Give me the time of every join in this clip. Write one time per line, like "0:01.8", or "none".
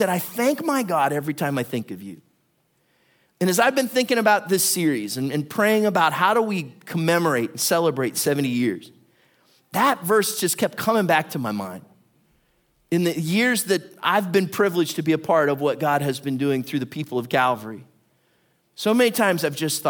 none